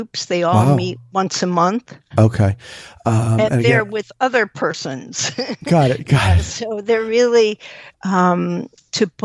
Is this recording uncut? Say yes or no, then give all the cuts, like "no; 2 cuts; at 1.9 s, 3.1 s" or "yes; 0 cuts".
no; 2 cuts; at 2.1 s, 7.9 s